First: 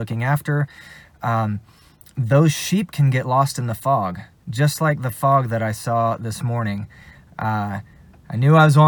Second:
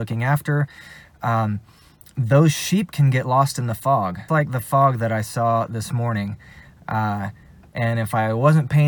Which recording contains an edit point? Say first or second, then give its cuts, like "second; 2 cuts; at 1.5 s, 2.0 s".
second; 2 cuts; at 4.3 s, 7.7 s